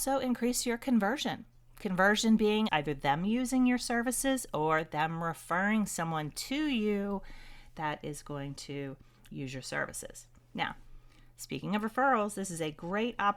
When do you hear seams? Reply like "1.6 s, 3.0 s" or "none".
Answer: 2.7 s